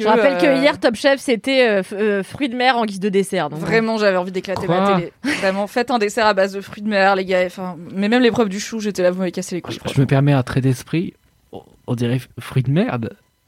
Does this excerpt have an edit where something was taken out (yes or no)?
no